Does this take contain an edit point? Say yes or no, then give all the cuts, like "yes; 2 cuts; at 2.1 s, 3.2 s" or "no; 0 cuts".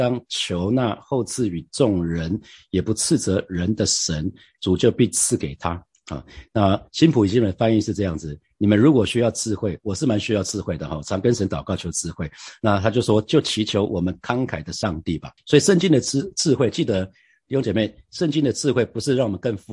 yes; 1 cut; at 15.4 s